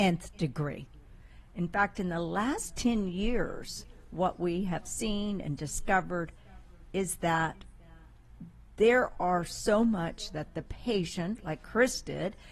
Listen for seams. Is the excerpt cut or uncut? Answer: cut